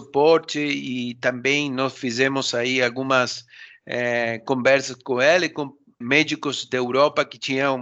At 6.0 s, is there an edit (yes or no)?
yes